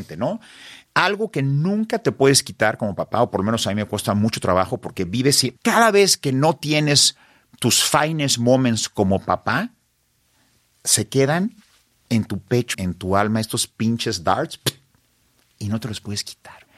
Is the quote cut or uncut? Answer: cut